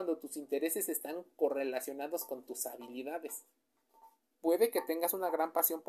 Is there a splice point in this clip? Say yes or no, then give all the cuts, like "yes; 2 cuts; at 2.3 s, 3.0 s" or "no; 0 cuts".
yes; 1 cut; at 4.3 s